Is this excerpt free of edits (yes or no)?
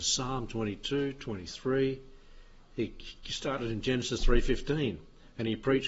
yes